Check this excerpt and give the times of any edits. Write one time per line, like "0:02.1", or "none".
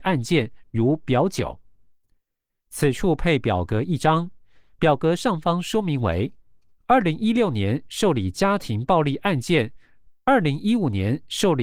0:06.8
0:10.1